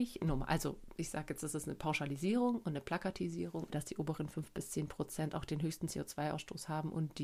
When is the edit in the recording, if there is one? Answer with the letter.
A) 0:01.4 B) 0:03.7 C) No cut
B